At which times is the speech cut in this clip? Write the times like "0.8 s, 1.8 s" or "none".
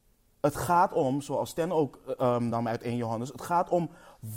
none